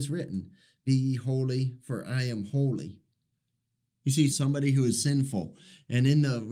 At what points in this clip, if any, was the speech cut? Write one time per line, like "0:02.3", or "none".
0:04.3